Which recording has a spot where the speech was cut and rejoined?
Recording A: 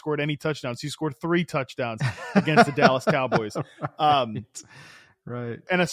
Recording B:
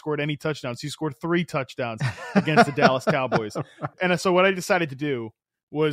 B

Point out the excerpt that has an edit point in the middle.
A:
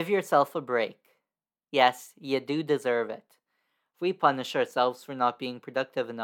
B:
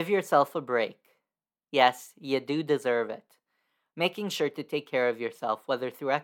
A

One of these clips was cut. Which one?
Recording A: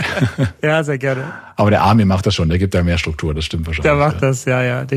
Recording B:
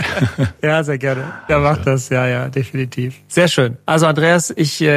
B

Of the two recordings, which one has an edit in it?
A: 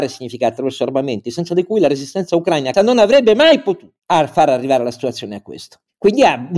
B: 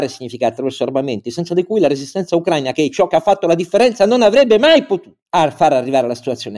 A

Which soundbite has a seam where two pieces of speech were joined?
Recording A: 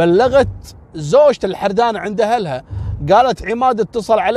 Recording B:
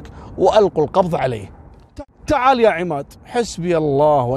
B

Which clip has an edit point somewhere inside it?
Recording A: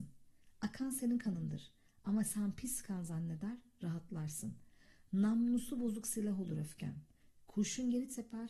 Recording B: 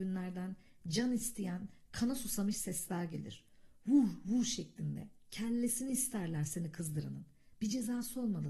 B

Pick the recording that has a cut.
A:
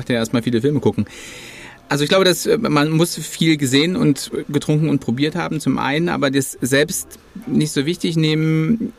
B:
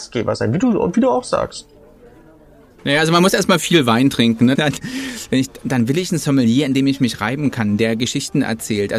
B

